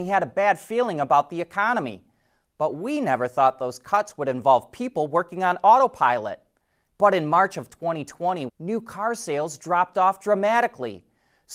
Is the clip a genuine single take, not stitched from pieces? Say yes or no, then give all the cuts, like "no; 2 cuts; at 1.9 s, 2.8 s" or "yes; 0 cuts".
no; 2 cuts; at 6.9 s, 8.5 s